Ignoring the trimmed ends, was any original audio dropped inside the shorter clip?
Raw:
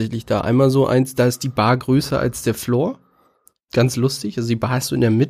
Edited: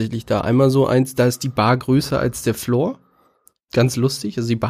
no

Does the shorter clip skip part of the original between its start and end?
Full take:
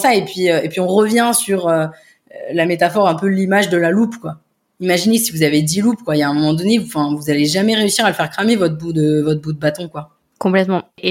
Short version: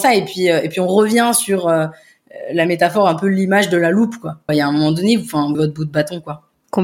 yes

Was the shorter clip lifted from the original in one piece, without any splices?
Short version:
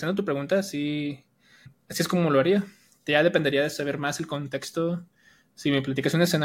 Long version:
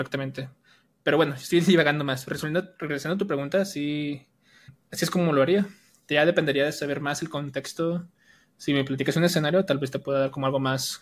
yes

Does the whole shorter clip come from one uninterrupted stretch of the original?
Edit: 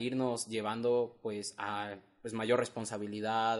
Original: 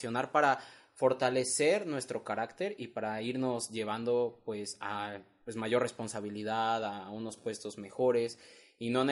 yes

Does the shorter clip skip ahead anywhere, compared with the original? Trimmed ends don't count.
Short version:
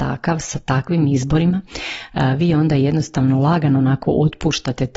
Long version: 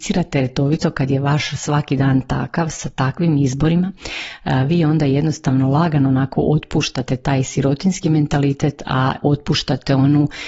no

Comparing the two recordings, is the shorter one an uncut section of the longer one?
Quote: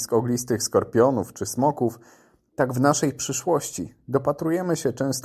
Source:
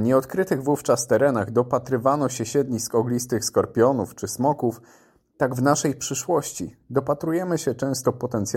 yes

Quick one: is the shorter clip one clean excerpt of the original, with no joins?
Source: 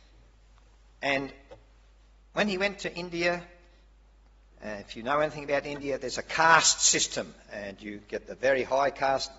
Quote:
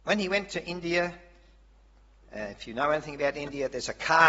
yes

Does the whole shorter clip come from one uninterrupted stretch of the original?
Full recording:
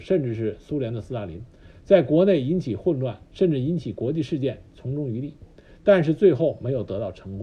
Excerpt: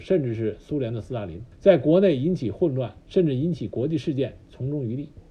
no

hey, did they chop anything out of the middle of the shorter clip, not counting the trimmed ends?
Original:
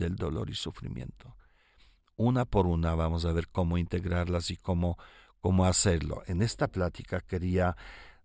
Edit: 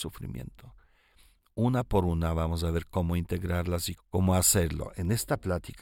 yes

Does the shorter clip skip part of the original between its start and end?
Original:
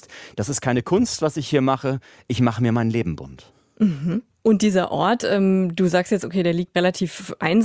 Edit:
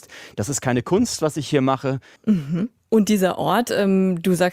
yes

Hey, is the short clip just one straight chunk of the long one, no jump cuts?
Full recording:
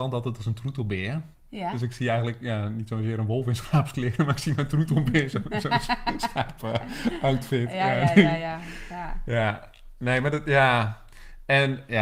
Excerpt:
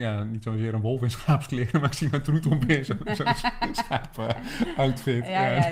yes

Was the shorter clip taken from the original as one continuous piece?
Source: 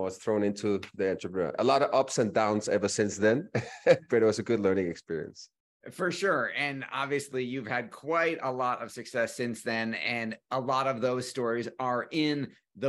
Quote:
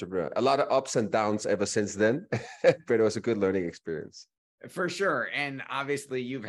yes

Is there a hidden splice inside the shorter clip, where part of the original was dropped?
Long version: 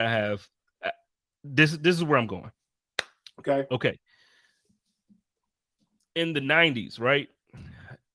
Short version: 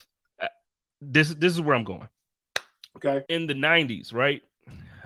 yes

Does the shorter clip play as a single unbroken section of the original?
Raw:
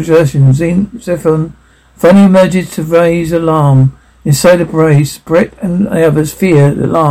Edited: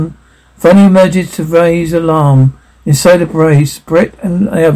yes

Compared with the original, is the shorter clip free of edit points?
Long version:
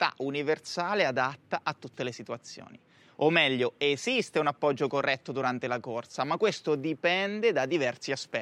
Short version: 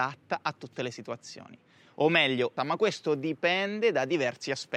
no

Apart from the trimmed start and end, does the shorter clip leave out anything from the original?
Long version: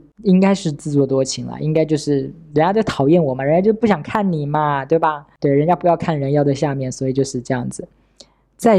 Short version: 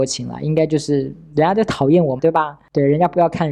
yes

